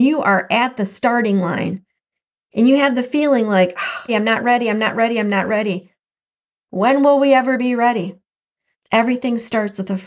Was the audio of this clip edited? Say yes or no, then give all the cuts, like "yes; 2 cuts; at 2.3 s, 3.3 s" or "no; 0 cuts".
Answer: yes; 1 cut; at 4.1 s